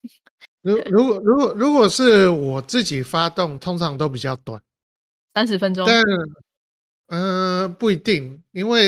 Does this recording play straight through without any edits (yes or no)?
no